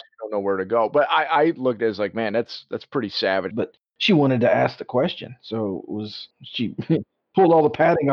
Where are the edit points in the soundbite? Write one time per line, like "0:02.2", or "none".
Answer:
0:03.5